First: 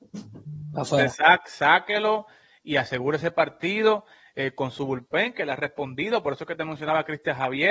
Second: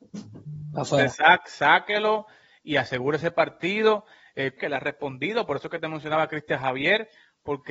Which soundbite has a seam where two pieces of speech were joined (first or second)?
second